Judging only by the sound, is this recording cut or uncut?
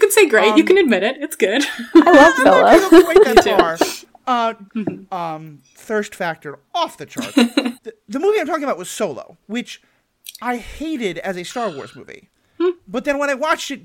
cut